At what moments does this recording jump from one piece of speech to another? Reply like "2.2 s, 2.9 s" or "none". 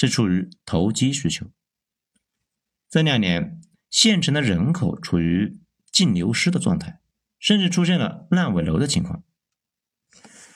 3.7 s, 7.4 s